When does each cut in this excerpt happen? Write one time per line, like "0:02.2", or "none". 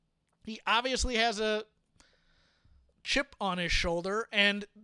none